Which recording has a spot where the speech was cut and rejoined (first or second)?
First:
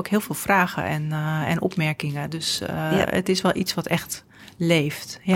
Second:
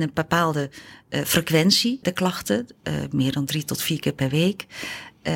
second